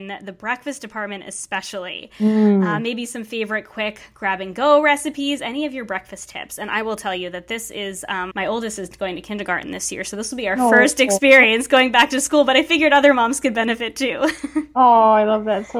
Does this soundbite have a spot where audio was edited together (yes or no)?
yes